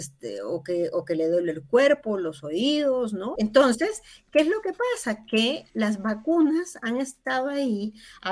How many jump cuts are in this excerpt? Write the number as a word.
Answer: one